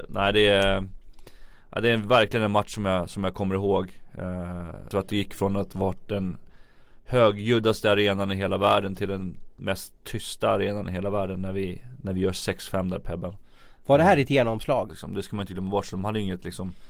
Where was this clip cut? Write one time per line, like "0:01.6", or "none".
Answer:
0:04.9
0:14.9